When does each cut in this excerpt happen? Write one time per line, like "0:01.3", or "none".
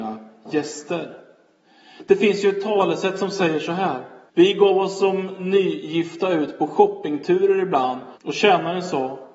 0:04.3
0:08.2